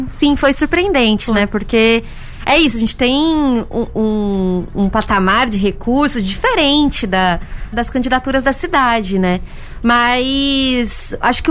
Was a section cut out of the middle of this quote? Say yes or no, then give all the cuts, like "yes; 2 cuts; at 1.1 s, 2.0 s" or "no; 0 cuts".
yes; 1 cut; at 7.7 s